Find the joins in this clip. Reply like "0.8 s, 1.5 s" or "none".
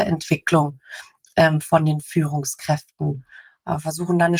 none

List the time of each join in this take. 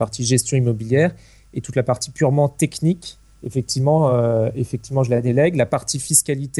none

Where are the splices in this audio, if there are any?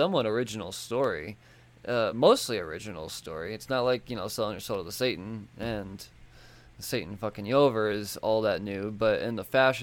none

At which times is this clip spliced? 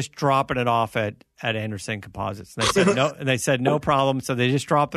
none

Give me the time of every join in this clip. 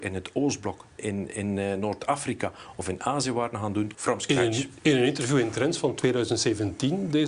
1.0 s, 3.9 s

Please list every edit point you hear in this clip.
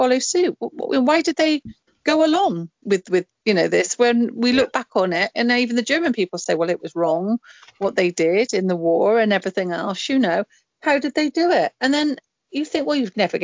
2.8 s

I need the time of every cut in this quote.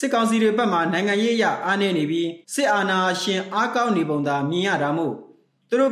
2.4 s

